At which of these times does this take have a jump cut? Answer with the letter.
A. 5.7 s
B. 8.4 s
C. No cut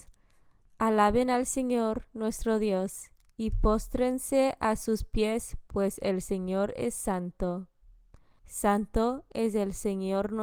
B